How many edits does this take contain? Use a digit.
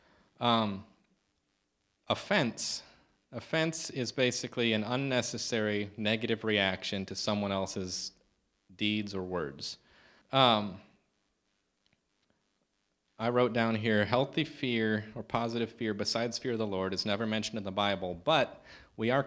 1